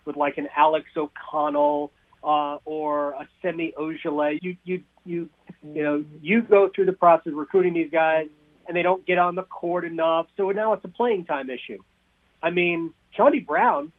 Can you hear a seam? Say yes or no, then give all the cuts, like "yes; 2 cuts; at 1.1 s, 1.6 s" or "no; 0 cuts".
yes; 1 cut; at 4.4 s